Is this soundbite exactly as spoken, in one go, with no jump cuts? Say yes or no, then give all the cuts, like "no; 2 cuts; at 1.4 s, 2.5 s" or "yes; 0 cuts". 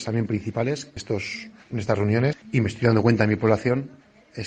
no; 2 cuts; at 1.0 s, 2.4 s